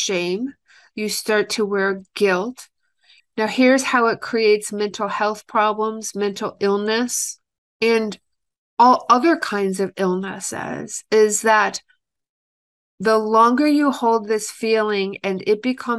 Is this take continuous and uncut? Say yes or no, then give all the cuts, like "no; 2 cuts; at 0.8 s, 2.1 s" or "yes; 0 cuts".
no; 1 cut; at 3.2 s